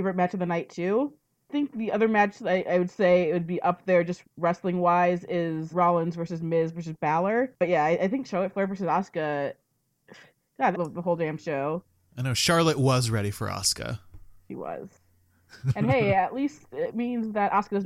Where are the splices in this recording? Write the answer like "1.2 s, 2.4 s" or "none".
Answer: 5.7 s, 10.7 s